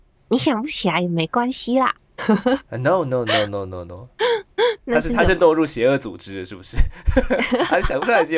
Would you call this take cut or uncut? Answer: uncut